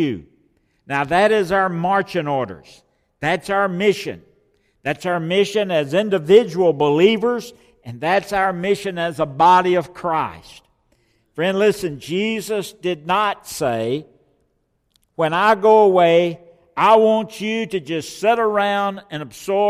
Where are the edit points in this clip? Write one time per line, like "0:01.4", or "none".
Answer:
none